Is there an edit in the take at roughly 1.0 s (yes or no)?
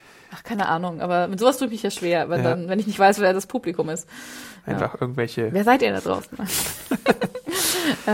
no